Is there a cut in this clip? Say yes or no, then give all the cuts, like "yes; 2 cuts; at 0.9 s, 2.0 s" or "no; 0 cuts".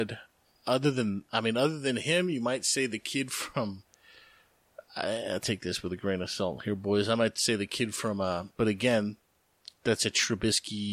yes; 1 cut; at 8.5 s